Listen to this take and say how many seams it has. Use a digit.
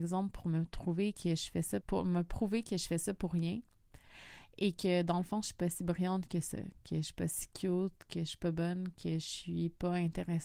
1